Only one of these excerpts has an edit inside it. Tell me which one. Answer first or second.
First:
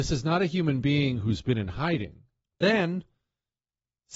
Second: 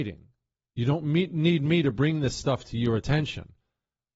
first